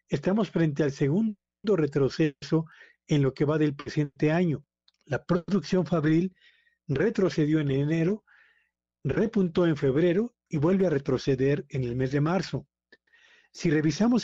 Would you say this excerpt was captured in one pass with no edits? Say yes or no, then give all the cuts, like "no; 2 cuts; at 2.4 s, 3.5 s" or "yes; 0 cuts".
yes; 0 cuts